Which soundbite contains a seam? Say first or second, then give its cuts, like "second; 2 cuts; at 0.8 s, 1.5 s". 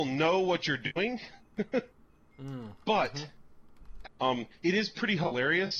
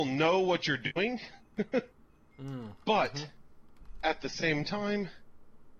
first; 1 cut; at 4.0 s